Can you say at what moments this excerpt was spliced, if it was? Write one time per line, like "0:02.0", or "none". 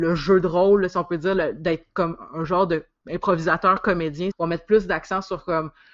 0:04.3